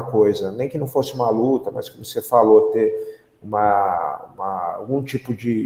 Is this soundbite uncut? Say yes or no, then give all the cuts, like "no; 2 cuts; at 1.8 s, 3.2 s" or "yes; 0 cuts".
yes; 0 cuts